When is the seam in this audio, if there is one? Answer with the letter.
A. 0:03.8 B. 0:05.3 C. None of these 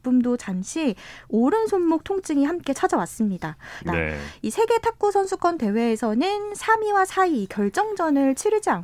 A